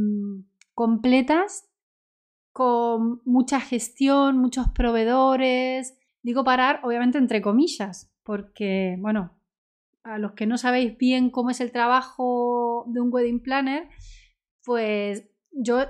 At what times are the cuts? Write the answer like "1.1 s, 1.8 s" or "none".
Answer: 6.1 s